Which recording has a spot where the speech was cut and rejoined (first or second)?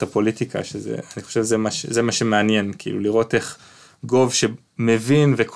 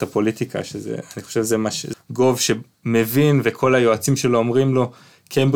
second